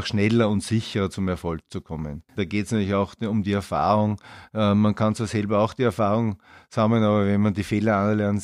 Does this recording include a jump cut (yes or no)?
yes